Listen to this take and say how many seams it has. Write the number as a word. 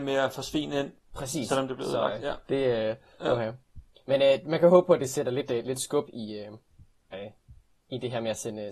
two